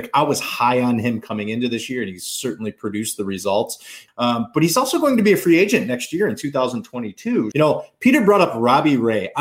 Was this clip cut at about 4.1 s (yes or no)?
yes